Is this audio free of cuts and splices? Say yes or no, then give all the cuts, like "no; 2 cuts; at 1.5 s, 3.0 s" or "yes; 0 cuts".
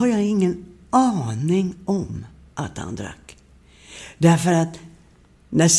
yes; 0 cuts